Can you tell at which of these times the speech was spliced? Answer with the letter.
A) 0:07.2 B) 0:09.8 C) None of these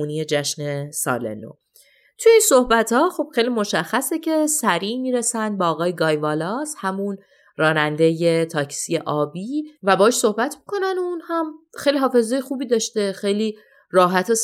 B